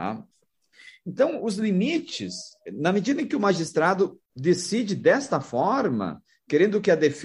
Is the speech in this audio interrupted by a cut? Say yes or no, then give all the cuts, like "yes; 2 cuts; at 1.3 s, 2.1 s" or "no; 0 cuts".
yes; 2 cuts; at 2.7 s, 4.3 s